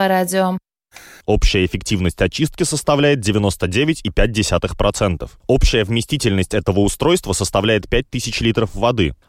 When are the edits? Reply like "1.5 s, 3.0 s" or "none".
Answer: 1.2 s